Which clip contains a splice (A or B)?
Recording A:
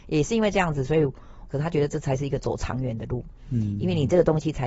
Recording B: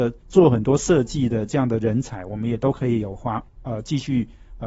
A